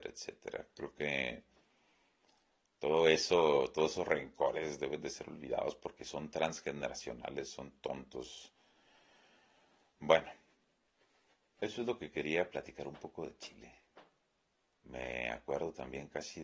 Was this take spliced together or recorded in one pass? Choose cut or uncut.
cut